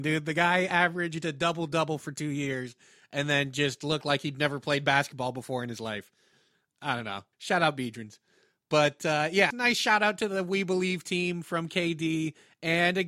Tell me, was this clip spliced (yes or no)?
yes